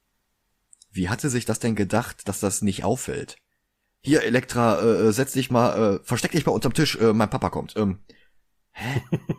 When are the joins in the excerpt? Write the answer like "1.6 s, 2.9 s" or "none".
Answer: none